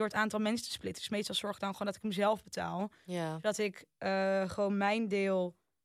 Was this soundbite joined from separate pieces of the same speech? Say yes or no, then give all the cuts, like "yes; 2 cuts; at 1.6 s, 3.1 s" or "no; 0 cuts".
no; 0 cuts